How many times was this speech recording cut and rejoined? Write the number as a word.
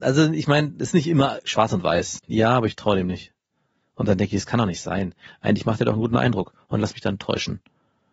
two